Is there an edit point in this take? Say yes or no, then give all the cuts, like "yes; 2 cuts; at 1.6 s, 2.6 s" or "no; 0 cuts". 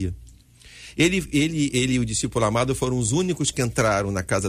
no; 0 cuts